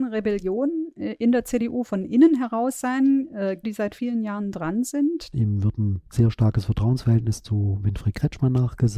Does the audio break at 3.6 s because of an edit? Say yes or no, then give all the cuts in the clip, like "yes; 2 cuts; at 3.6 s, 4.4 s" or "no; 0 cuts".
yes; 2 cuts; at 3.6 s, 5.3 s